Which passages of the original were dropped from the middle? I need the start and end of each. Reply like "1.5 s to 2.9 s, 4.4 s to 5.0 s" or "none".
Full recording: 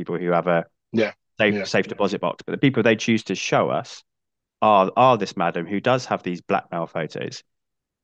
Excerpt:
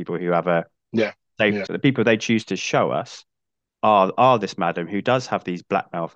1.7 s to 2.4 s